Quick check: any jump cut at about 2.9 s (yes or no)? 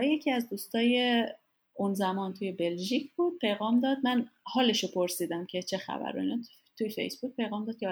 no